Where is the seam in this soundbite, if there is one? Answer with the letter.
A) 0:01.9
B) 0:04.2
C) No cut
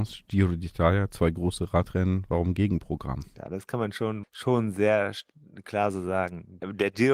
B